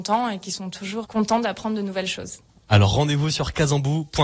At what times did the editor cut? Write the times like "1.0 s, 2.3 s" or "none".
1.0 s